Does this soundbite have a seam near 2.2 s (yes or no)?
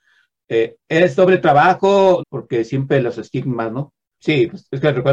yes